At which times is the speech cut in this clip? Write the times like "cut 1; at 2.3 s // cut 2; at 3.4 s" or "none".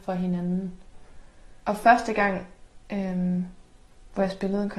cut 1; at 1.6 s // cut 2; at 2.8 s